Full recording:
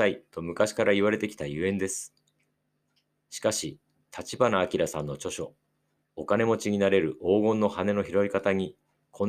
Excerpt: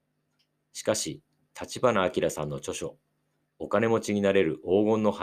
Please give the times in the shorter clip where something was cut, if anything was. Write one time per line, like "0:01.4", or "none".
none